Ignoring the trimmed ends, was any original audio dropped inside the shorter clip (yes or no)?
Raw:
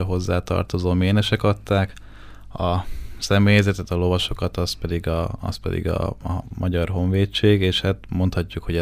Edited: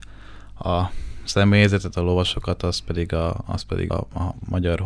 yes